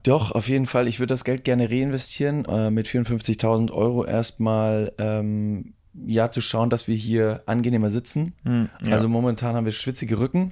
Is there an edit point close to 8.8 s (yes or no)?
no